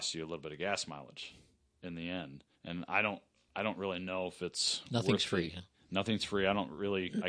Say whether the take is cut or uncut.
cut